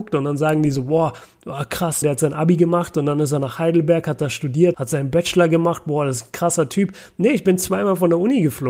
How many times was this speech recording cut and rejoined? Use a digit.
2